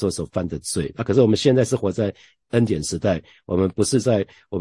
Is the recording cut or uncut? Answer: uncut